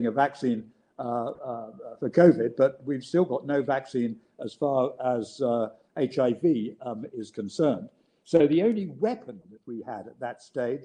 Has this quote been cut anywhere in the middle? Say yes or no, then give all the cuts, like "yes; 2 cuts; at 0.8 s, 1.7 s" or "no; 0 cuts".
no; 0 cuts